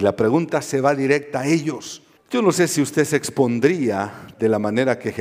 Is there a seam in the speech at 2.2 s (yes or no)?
yes